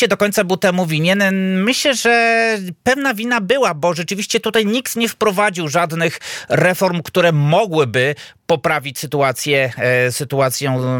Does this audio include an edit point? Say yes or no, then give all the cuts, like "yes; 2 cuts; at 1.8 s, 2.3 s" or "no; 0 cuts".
no; 0 cuts